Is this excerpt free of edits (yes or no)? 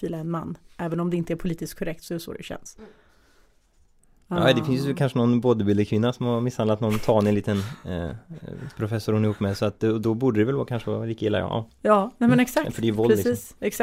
yes